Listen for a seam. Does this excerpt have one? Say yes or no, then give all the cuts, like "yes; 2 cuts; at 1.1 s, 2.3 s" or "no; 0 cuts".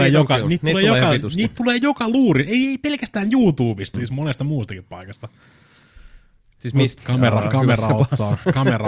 yes; 2 cuts; at 3.9 s, 7.0 s